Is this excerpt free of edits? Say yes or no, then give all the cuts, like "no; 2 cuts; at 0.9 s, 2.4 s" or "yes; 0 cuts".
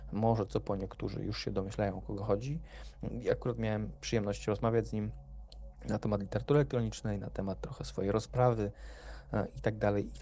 no; 1 cut; at 3.1 s